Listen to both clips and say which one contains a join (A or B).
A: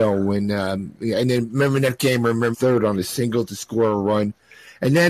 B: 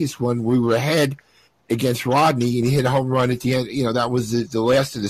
A